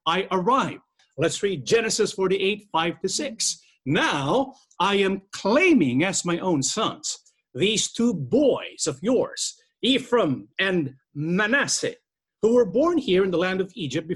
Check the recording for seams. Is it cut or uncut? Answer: cut